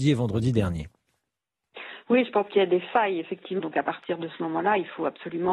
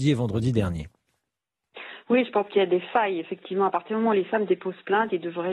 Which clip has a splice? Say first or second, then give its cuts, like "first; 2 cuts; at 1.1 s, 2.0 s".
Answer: first; 1 cut; at 3.6 s